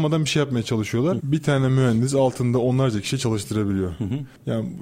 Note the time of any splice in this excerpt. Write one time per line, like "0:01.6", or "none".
0:01.2

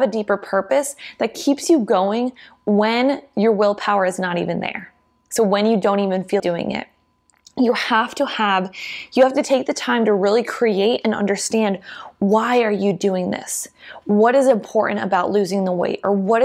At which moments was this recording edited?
0:06.4

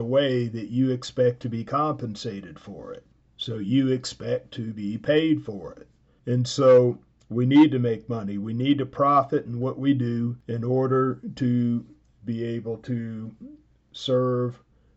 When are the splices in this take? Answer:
0:06.2

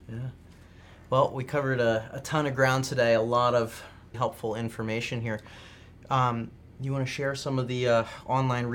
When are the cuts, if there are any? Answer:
0:04.1

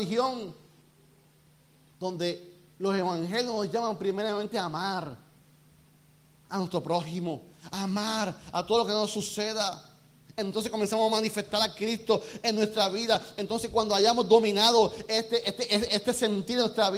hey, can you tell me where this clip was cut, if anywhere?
none

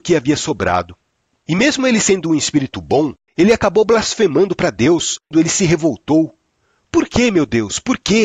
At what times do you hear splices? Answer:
0:03.3
0:05.3

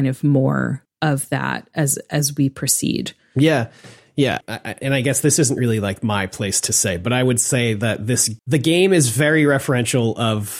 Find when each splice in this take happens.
0:04.4
0:08.4

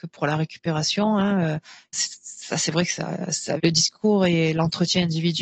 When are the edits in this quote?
0:01.9
0:03.6

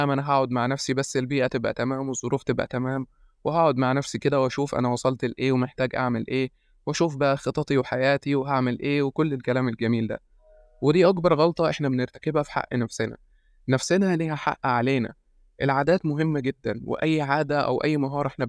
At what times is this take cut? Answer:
none

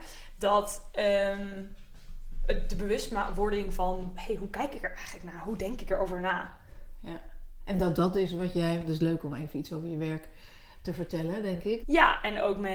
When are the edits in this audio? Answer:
0:11.8

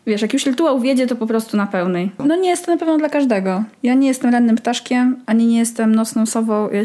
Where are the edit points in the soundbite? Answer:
0:02.2

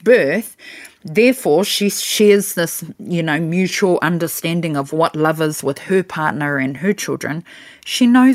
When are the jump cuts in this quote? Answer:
none

